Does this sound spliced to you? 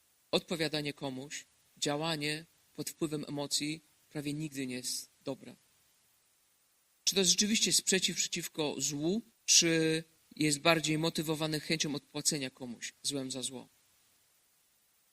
yes; 2 cuts; at 6.9 s, 9.3 s

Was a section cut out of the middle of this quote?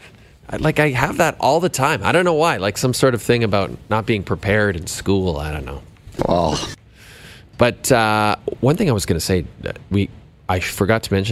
yes; 1 cut; at 7.5 s

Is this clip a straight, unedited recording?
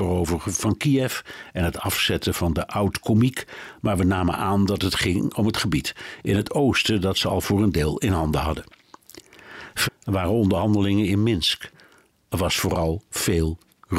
no; 1 cut; at 9.9 s

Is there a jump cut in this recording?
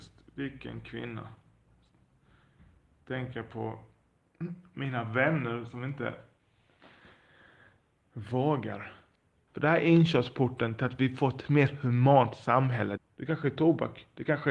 yes; 2 cuts; at 9.5 s, 13.0 s

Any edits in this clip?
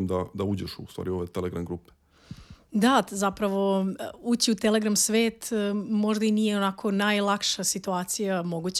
no; 0 cuts

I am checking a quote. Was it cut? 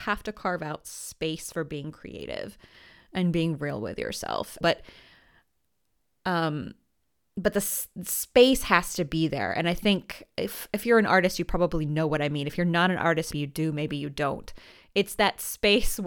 yes; 2 cuts; at 4.6 s, 13.3 s

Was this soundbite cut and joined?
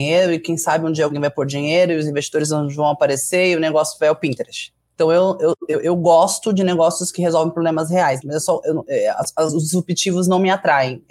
yes; 1 cut; at 8.2 s

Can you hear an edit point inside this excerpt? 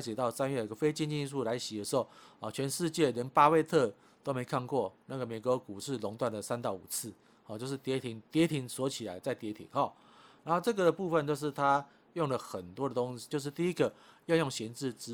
yes; 1 cut; at 13.3 s

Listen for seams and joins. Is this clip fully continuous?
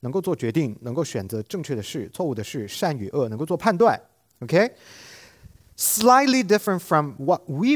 yes; 0 cuts

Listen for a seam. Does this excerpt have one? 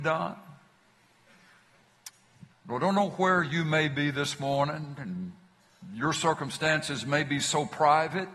yes; 1 cut; at 2.5 s

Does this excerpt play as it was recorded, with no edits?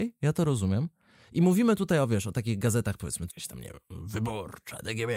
no; 1 cut; at 3.3 s

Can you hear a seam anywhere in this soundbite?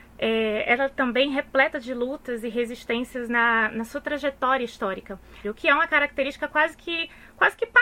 yes; 1 cut; at 5.4 s

